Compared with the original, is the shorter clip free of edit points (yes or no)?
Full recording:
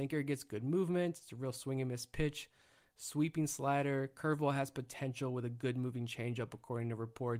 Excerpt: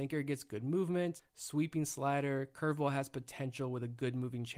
no